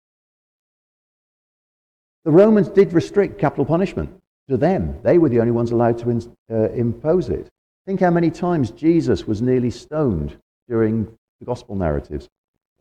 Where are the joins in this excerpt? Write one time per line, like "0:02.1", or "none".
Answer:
0:07.7